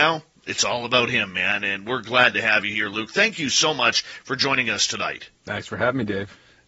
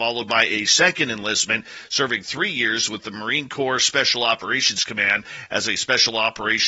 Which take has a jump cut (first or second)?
first